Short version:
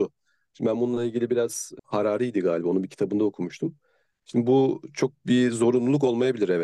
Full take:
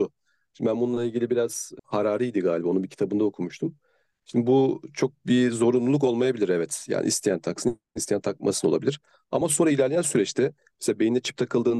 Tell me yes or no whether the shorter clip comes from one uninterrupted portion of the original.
yes